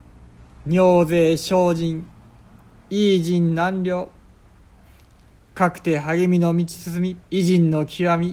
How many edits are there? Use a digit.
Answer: 1